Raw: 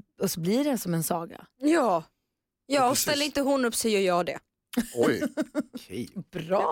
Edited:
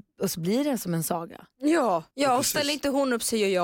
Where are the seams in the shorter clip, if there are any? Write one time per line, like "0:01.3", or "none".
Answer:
0:02.1

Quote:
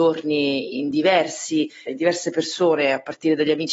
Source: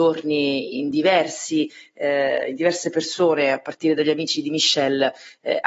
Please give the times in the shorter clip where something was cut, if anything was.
0:01.9

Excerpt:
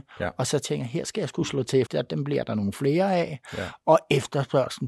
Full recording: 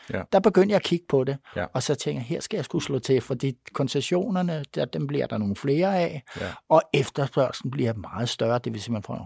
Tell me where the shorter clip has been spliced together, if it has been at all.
0:01.9

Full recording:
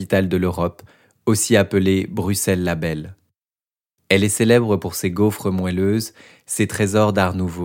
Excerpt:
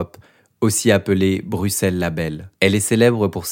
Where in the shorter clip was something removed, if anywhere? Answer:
0:02.6

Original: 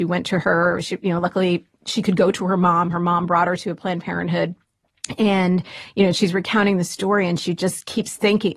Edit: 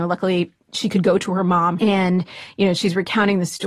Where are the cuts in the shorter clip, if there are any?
0:01.8

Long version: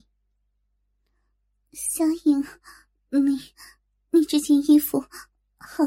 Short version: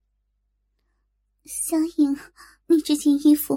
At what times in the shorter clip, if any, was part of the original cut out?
0:02.6

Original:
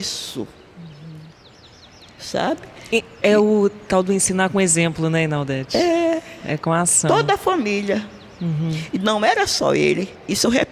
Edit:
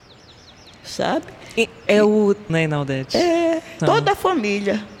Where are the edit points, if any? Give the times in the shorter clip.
0:02.5
0:03.8

